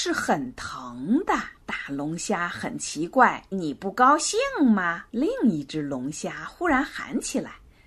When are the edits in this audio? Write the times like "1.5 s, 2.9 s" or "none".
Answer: 1.6 s, 3.5 s, 5.1 s